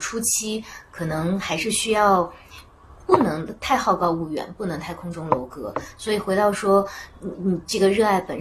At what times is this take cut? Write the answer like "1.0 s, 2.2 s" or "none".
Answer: none